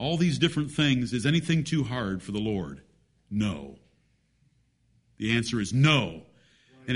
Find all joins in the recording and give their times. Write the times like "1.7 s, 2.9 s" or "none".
none